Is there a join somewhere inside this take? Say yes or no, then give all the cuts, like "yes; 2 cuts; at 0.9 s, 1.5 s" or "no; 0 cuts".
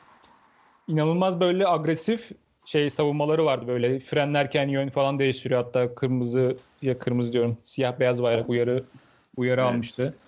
no; 0 cuts